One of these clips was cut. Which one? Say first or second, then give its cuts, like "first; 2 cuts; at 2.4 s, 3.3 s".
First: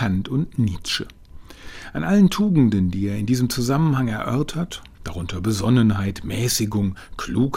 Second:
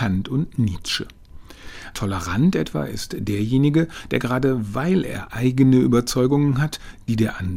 second; 1 cut; at 1.9 s